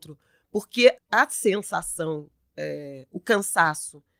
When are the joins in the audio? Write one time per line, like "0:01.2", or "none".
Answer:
0:01.0

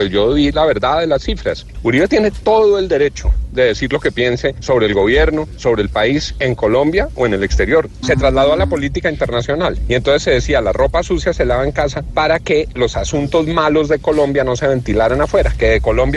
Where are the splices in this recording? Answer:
0:01.7
0:08.0

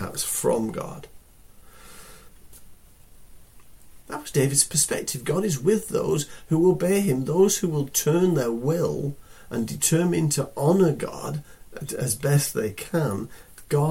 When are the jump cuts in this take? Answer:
0:04.0

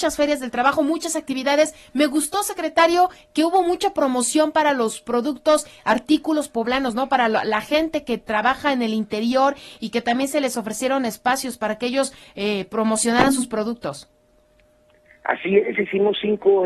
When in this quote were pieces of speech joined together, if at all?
none

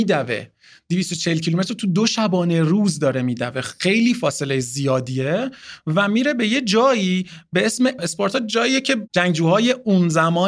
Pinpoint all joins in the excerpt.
0:08.0

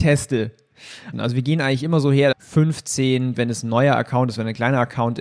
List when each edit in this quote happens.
0:01.1
0:02.3
0:03.4

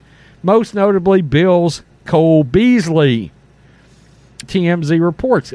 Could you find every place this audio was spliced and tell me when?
0:04.4

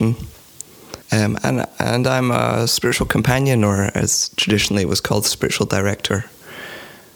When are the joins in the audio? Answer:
0:01.0

